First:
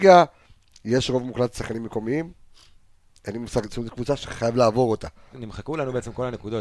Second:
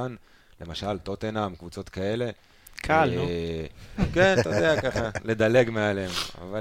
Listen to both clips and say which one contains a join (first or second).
first